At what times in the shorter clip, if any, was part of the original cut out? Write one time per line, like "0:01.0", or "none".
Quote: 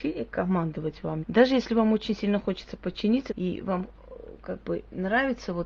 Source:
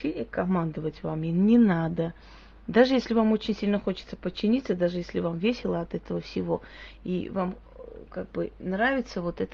0:01.2
0:03.3